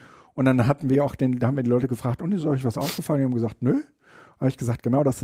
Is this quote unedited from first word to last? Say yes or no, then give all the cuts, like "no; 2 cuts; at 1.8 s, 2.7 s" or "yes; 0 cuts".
yes; 0 cuts